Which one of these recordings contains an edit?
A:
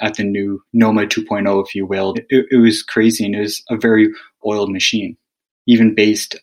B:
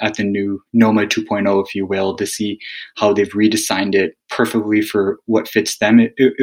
A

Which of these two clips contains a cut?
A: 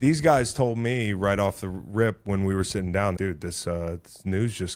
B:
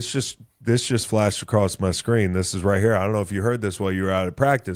A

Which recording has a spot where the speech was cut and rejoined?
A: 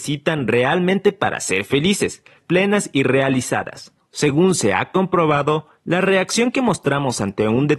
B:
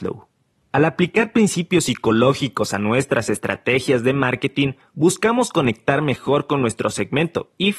A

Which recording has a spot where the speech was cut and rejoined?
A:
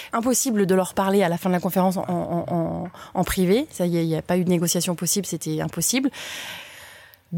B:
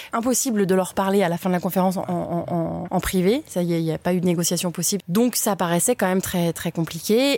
B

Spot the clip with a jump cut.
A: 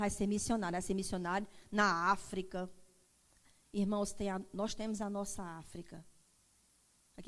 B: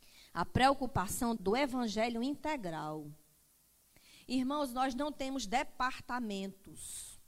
B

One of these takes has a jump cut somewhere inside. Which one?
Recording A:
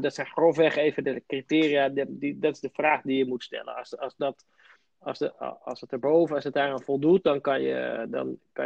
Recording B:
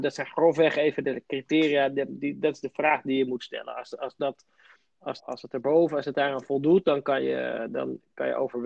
B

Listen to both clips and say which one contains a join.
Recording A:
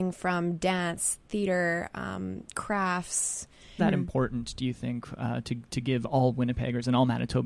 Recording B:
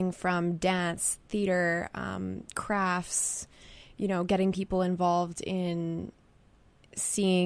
A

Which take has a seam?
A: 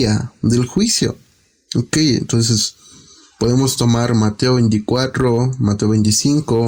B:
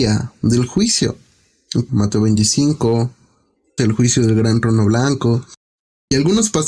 B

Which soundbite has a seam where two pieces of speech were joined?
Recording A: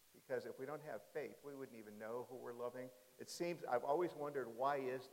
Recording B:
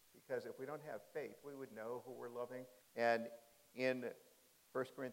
B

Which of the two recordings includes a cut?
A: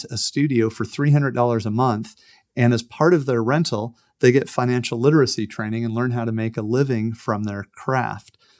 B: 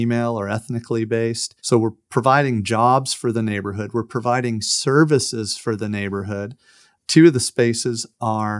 B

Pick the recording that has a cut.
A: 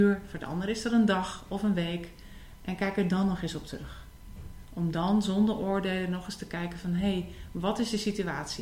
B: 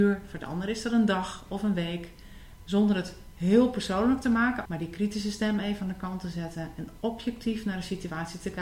B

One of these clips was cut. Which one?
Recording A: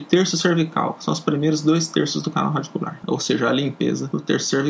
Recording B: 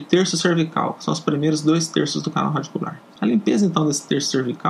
A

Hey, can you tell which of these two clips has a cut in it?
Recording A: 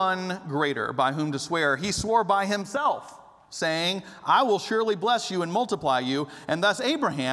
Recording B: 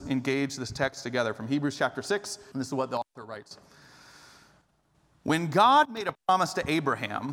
B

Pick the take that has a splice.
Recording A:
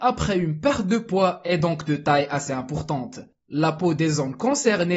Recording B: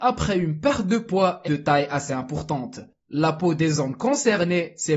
B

